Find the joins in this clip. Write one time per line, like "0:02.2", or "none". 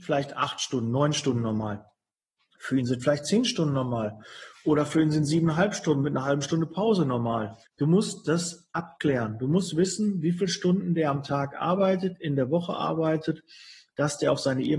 0:07.7